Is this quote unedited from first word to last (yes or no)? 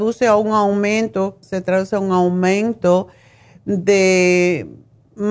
no